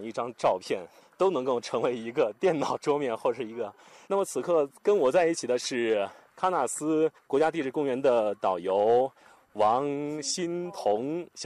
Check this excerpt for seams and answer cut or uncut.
cut